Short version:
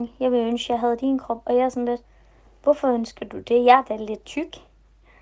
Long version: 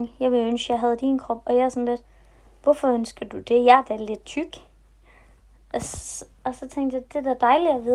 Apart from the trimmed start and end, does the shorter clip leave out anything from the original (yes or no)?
no